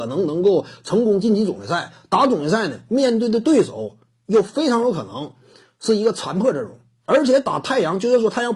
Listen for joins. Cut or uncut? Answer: uncut